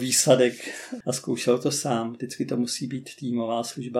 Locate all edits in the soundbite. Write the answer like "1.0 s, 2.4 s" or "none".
1.0 s